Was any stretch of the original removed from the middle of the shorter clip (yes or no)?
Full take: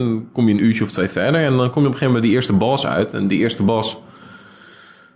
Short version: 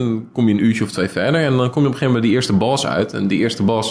no